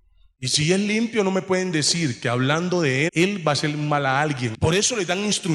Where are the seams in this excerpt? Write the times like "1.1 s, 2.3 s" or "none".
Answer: 3.1 s, 4.5 s

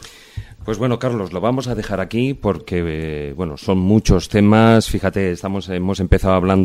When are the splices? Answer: none

